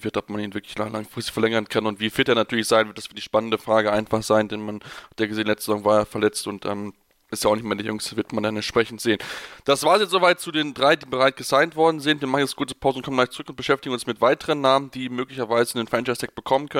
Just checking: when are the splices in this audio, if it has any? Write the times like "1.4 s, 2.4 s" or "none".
7.3 s

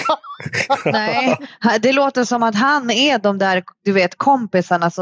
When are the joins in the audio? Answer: none

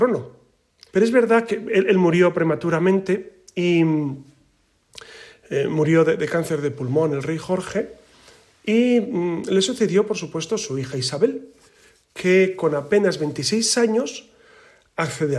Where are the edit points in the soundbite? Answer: 0.9 s

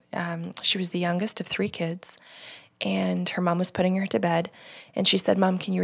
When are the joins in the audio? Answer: none

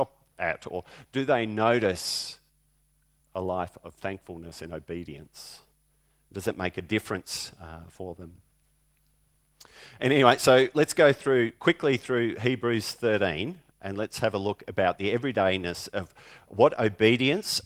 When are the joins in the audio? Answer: 3.2 s

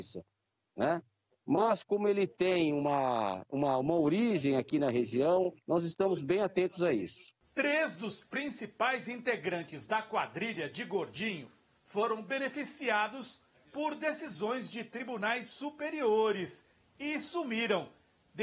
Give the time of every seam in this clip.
5.6 s, 7.4 s

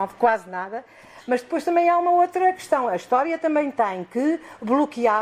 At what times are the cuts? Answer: none

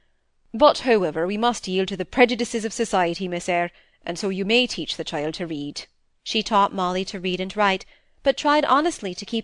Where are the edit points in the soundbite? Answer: 6.2 s

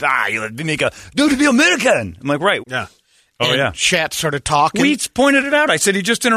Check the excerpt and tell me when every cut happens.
2.6 s

